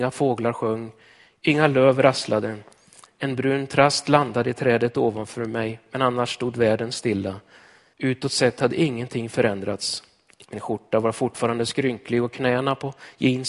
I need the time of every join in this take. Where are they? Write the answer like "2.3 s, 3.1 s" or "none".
7.9 s